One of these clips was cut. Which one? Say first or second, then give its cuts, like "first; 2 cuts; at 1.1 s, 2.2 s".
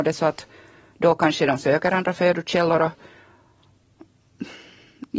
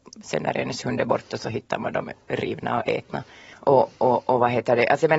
second; 1 cut; at 3.5 s